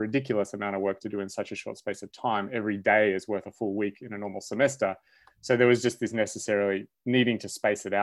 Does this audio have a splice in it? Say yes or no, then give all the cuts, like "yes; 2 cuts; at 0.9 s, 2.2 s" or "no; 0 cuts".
no; 0 cuts